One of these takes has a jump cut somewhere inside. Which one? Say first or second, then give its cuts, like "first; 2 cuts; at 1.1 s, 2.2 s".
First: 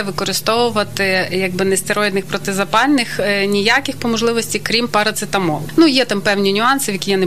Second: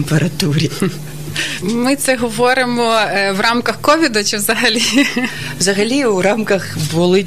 second; 1 cut; at 1.6 s